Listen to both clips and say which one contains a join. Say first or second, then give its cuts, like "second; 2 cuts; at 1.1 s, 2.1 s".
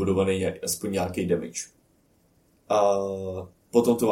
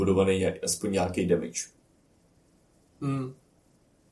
first; 1 cut; at 2.6 s